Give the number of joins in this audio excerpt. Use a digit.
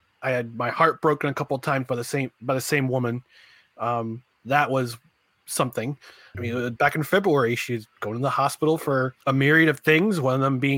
2